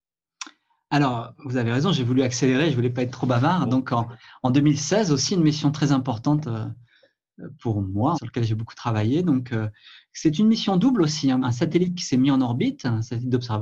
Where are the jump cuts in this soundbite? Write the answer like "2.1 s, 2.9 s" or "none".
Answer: 8.1 s, 11.4 s